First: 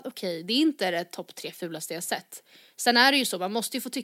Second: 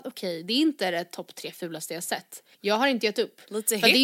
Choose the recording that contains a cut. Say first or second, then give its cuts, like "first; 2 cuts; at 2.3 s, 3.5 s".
second; 1 cut; at 2.5 s